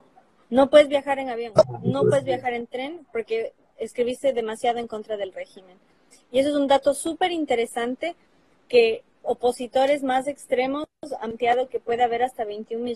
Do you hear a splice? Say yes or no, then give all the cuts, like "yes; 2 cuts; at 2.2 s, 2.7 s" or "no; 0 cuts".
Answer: no; 0 cuts